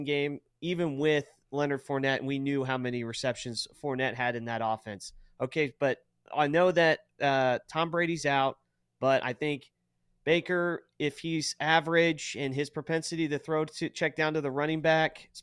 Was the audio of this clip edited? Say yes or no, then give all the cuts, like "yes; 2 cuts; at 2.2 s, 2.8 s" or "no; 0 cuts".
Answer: no; 0 cuts